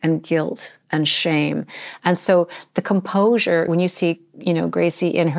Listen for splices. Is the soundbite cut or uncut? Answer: uncut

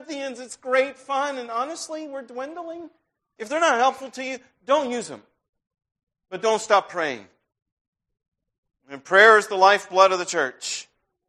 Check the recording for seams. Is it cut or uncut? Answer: cut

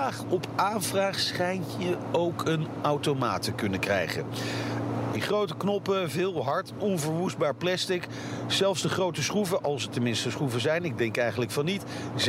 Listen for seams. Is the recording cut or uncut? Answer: cut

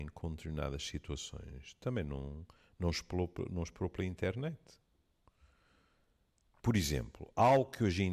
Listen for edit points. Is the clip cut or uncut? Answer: uncut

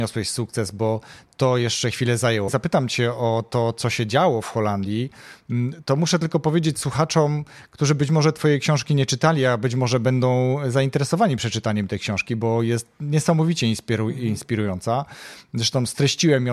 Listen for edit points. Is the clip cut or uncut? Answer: cut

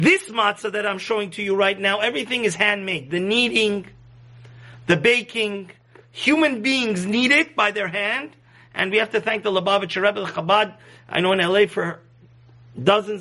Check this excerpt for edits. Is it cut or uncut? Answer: uncut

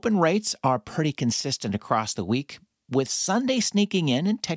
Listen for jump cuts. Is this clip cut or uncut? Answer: uncut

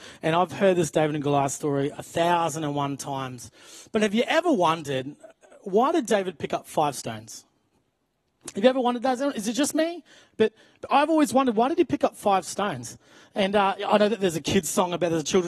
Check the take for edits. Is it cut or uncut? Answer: uncut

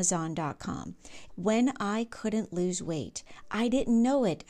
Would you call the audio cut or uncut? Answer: cut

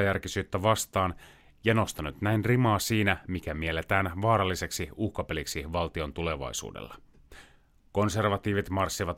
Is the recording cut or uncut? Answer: uncut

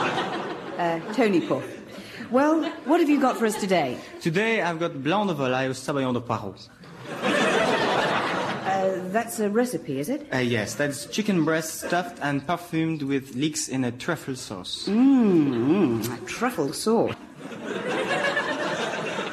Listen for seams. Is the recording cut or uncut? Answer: cut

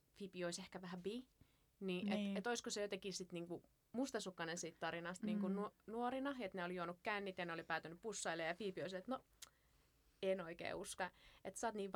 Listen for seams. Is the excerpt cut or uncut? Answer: cut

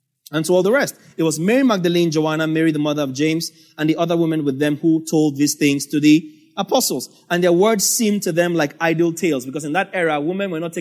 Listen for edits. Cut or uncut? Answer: uncut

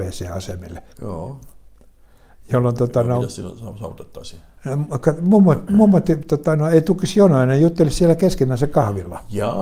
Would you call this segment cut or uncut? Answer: cut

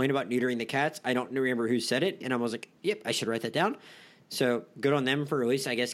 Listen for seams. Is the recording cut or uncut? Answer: cut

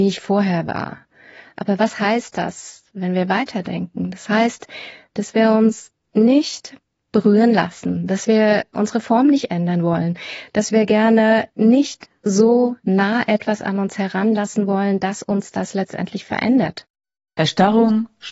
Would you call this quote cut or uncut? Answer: uncut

